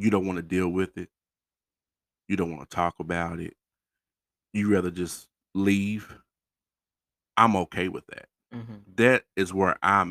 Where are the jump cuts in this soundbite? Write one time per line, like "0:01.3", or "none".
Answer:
none